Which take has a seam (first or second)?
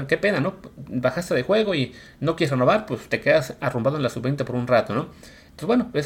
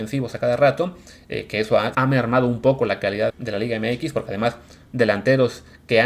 second